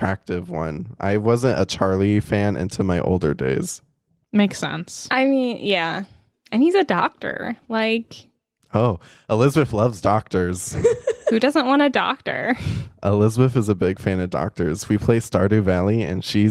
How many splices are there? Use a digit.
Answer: 0